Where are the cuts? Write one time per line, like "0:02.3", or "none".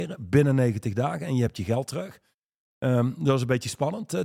none